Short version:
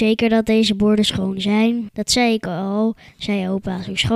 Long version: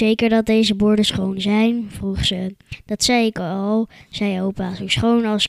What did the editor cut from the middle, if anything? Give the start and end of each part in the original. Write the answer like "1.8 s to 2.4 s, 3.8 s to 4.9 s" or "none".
1.9 s to 2.8 s